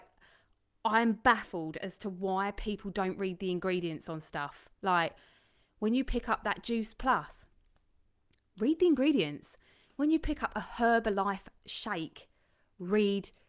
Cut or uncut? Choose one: uncut